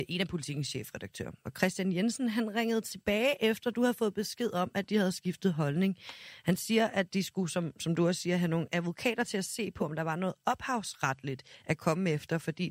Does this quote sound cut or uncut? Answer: uncut